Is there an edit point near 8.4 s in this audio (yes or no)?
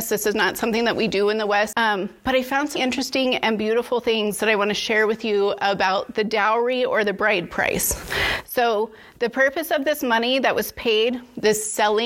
no